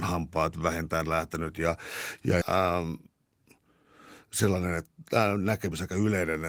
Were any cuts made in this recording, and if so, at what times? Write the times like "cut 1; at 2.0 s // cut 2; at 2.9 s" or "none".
cut 1; at 2.4 s

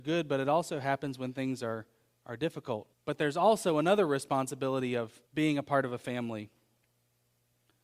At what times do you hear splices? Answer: cut 1; at 2.9 s // cut 2; at 5.3 s

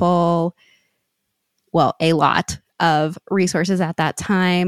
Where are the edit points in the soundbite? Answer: none

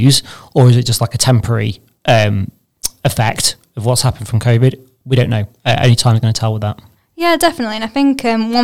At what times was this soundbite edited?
none

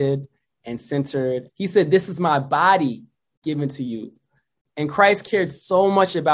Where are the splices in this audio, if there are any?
cut 1; at 1.5 s

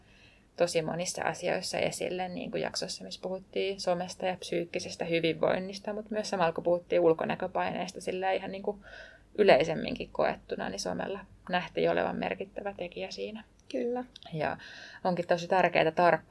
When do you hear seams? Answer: none

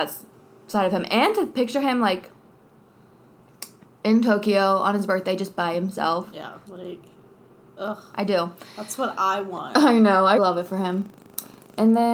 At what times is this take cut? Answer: cut 1; at 6.7 s // cut 2; at 10.4 s

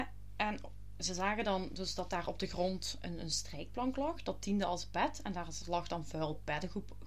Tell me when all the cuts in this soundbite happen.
none

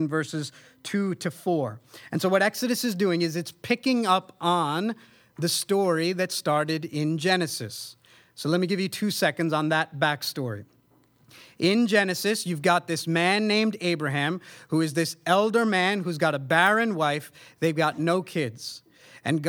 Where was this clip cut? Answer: none

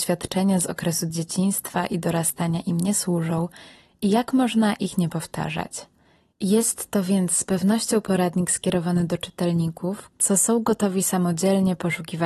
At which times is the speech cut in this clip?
cut 1; at 6.3 s // cut 2; at 10.1 s

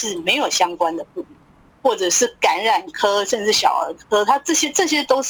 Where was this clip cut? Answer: cut 1; at 1.7 s

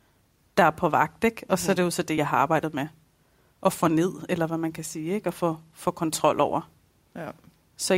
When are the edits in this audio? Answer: none

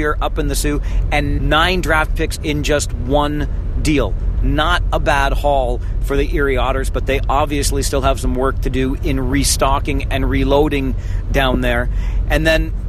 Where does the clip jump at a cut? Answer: cut 1; at 1.4 s

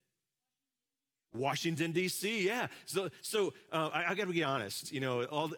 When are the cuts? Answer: none

